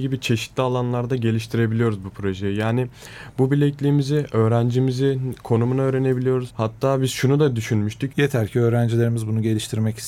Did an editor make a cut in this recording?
yes; 2 cuts; at 6.5 s, 8.1 s

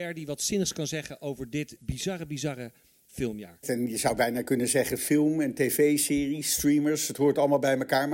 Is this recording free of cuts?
no; 1 cut; at 3.6 s

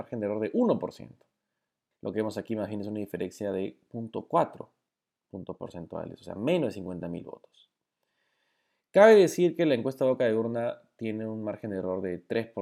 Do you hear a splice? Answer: yes; 1 cut; at 1.9 s

